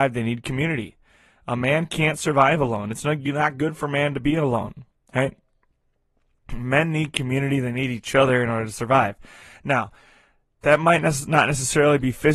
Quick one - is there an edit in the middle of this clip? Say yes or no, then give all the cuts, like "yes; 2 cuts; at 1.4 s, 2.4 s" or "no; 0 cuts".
no; 0 cuts